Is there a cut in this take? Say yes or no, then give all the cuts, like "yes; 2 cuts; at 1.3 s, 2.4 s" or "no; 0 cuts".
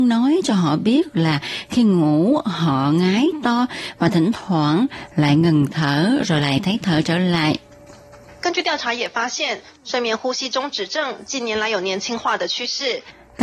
no; 0 cuts